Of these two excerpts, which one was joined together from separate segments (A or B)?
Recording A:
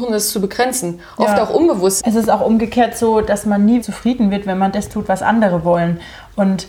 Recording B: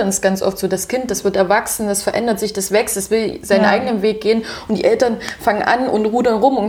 A